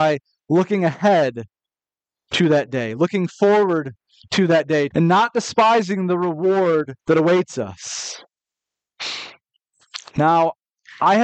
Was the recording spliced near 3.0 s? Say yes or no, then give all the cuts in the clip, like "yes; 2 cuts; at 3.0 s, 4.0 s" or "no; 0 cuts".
no; 2 cuts; at 4.9 s, 7.0 s